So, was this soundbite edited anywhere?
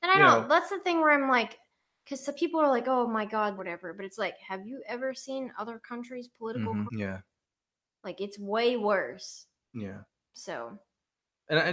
yes; 3 cuts; at 3.6 s, 6.9 s, 9.7 s

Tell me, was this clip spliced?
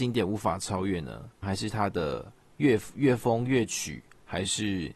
yes; 1 cut; at 1.4 s

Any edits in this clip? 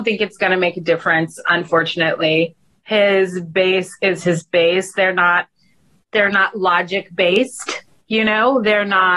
no; 0 cuts

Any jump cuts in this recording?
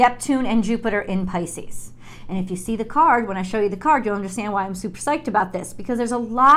no; 0 cuts

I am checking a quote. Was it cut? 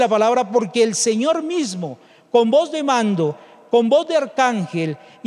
no; 0 cuts

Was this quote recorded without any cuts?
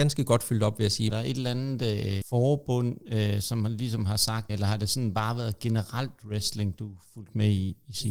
no; 3 cuts; at 1.1 s, 2.2 s, 4.5 s

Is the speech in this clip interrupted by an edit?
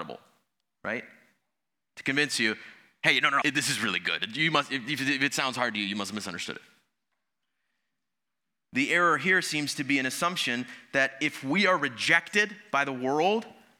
yes; 1 cut; at 3.4 s

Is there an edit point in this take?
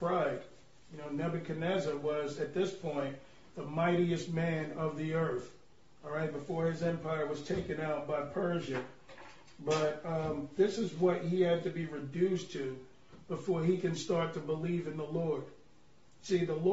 no; 0 cuts

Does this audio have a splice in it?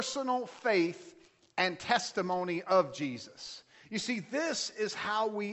no; 0 cuts

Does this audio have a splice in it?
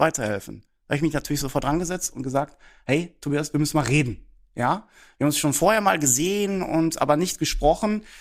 no; 0 cuts

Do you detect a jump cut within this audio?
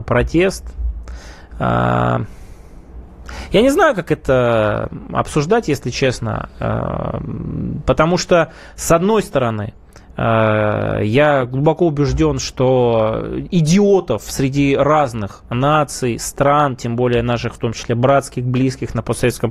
no; 0 cuts

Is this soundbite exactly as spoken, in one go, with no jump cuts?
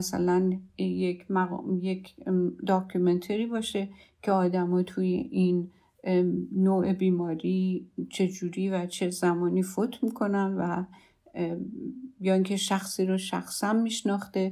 yes; 0 cuts

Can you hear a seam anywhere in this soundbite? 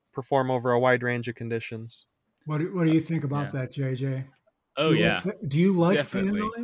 no; 0 cuts

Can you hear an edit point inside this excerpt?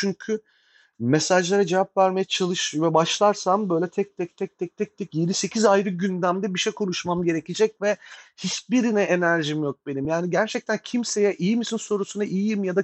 no; 0 cuts

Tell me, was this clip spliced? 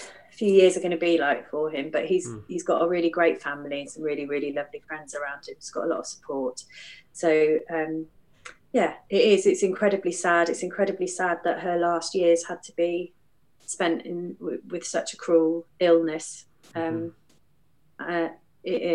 no; 0 cuts

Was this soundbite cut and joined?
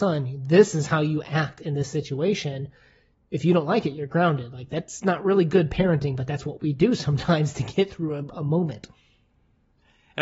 no; 0 cuts

